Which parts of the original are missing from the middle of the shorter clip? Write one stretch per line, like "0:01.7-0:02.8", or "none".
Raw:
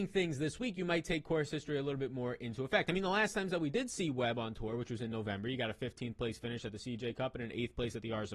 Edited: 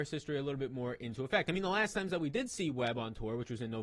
none